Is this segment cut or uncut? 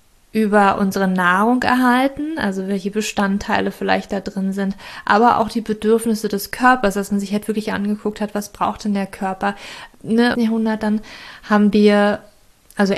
cut